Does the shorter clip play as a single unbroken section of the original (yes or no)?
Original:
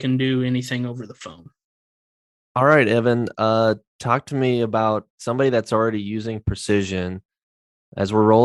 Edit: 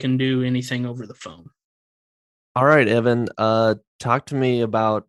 yes